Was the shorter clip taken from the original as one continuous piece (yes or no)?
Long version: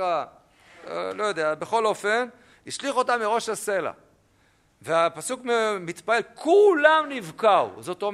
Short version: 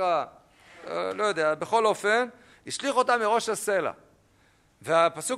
yes